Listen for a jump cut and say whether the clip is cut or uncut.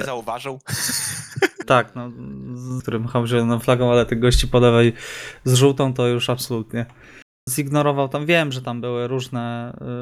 cut